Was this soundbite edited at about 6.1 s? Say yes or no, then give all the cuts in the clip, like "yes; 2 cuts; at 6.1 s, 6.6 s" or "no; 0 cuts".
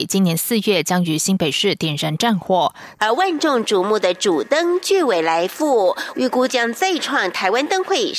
yes; 2 cuts; at 3.0 s, 6.1 s